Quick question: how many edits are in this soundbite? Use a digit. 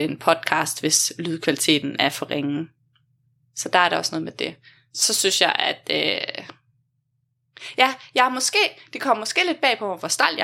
0